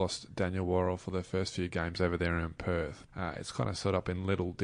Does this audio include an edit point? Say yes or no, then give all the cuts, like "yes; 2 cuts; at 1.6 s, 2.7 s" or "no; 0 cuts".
yes; 1 cut; at 3.1 s